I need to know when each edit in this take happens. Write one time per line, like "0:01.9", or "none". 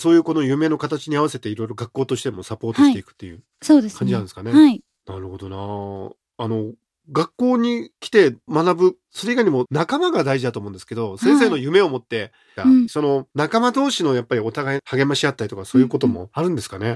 0:12.6